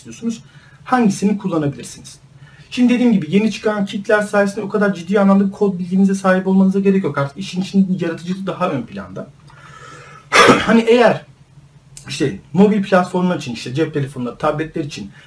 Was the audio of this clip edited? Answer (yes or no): no